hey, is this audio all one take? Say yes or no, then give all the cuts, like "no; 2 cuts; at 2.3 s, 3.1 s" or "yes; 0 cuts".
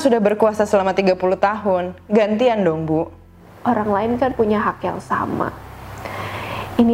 yes; 0 cuts